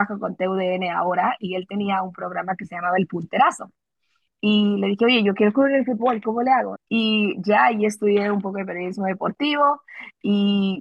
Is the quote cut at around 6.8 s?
yes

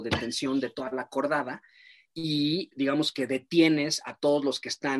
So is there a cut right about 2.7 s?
yes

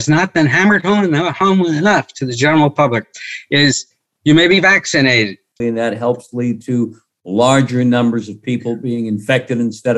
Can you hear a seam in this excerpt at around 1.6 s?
no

